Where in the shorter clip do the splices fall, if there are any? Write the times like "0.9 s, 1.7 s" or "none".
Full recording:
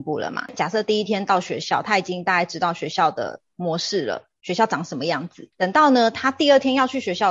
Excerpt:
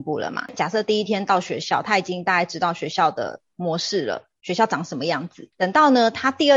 none